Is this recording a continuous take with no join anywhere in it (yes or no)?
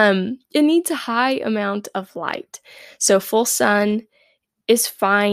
yes